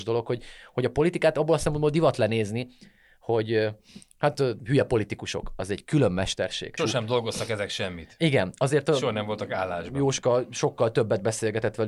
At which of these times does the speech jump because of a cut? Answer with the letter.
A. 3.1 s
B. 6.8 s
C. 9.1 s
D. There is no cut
B